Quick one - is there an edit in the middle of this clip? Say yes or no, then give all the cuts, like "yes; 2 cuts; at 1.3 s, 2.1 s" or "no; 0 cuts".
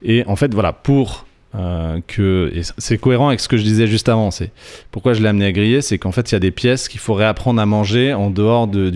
no; 0 cuts